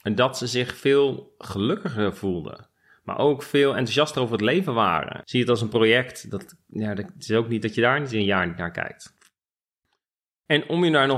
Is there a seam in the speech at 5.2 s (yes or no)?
yes